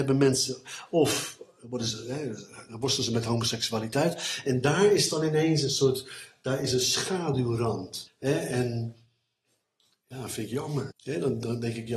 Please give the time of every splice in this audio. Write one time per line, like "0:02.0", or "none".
0:08.1
0:10.9